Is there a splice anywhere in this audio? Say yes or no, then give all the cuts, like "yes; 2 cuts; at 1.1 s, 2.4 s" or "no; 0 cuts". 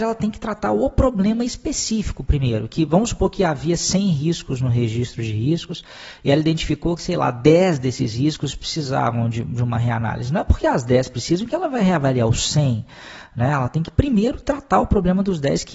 no; 0 cuts